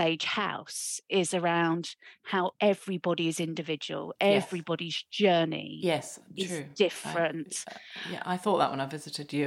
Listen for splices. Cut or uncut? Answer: uncut